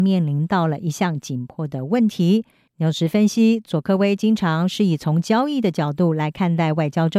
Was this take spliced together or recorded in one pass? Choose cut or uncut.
cut